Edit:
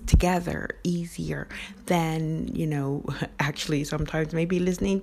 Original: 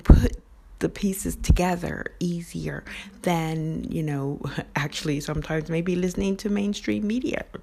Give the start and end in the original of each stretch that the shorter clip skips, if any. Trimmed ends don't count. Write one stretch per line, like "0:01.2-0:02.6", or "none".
none